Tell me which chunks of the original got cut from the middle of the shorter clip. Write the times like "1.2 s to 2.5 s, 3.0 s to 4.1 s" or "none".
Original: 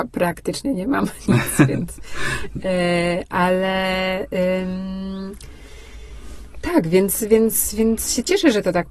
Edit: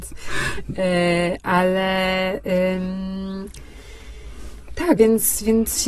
6.8 s to 7.3 s